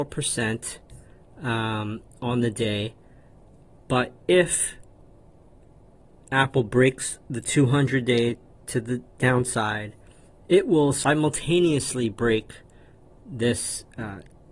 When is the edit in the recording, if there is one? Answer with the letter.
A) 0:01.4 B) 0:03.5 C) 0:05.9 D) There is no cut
D